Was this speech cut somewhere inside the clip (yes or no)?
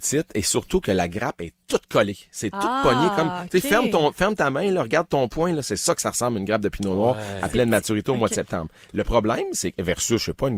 no